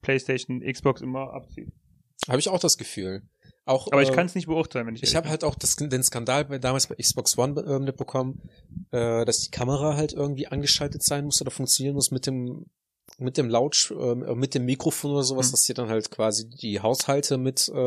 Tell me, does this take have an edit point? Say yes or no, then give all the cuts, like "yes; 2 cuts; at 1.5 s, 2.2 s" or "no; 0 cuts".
no; 0 cuts